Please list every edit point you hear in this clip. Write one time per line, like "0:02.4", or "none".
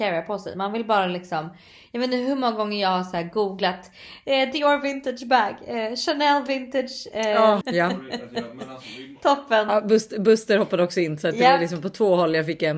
0:07.6